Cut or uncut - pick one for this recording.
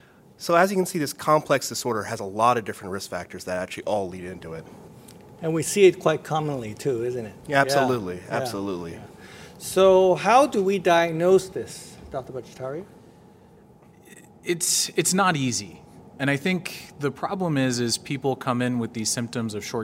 uncut